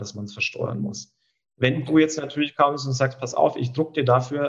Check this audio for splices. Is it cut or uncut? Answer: uncut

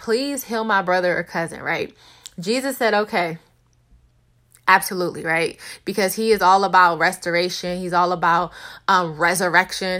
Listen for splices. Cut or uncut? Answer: uncut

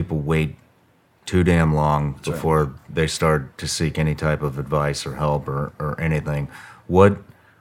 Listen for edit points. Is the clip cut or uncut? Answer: uncut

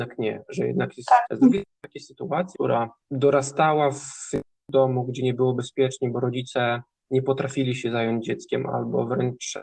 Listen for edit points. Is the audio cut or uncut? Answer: cut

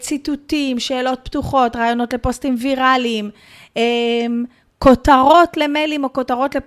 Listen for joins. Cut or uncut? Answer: uncut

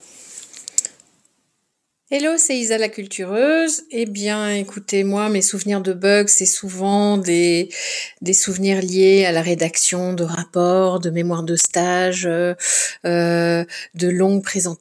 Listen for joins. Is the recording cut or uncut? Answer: uncut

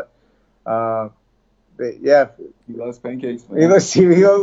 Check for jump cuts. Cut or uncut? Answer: uncut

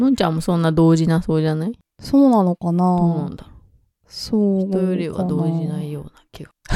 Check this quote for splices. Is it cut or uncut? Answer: uncut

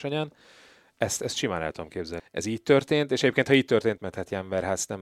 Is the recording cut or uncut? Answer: cut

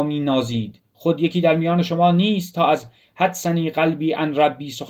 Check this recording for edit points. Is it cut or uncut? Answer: uncut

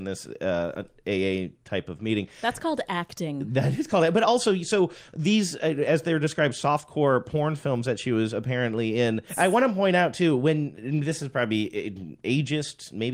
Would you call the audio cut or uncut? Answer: cut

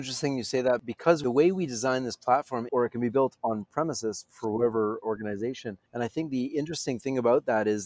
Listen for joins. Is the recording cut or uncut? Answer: cut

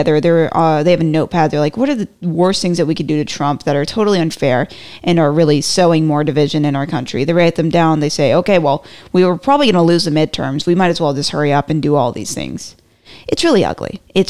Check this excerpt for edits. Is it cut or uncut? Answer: uncut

